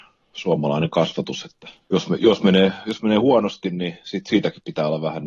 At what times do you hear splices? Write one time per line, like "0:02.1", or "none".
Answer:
0:01.8

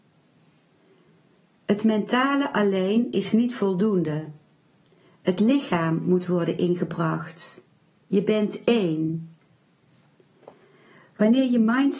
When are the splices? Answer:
0:08.0

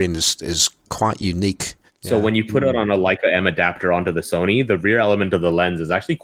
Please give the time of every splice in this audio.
0:01.9

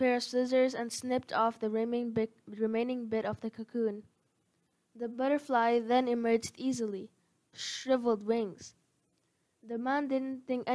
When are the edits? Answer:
0:07.5

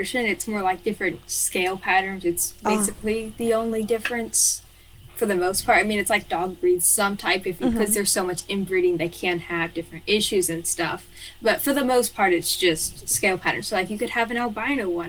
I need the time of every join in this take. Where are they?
0:05.1

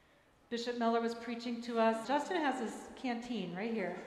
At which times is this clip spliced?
0:02.0

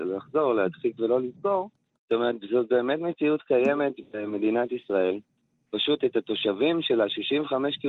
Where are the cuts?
0:01.9

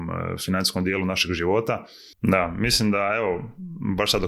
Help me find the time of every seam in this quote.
0:02.1

